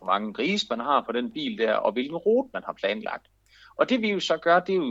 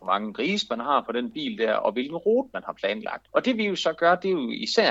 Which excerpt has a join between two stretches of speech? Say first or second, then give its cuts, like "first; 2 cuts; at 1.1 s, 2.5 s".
second; 1 cut; at 3.3 s